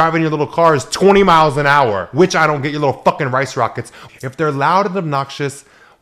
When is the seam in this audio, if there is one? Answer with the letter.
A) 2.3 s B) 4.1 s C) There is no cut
B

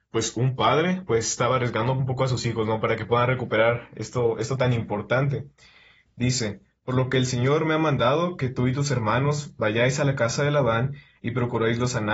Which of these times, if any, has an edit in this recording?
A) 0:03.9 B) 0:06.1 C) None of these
B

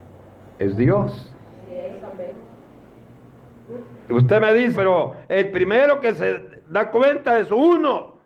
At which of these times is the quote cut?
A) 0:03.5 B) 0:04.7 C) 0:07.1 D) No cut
B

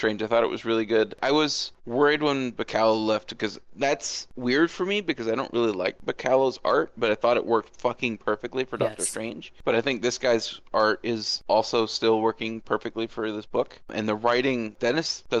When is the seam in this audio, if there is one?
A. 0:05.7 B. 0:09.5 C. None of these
C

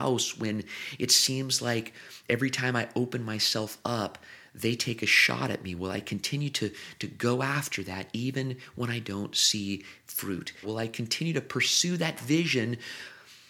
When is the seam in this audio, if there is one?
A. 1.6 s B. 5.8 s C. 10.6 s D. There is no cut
C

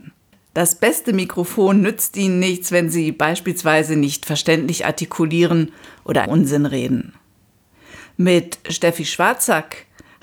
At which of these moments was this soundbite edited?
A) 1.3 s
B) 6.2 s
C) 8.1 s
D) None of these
B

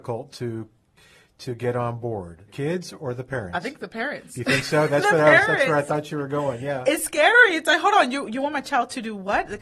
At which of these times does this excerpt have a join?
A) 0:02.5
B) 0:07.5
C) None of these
A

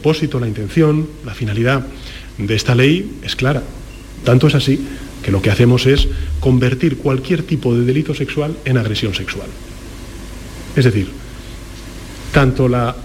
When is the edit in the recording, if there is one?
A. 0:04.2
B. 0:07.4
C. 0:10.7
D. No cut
A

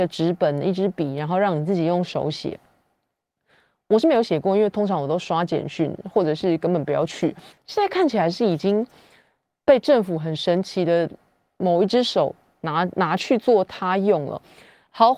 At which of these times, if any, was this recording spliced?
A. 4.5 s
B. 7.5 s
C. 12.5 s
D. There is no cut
B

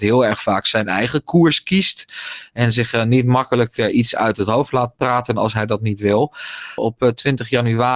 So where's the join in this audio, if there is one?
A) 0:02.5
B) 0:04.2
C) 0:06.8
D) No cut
C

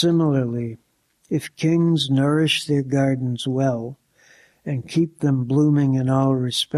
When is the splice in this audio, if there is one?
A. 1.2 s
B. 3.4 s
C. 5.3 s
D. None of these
D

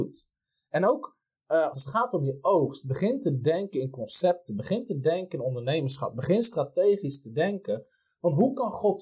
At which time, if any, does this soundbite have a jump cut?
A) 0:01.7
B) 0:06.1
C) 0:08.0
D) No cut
A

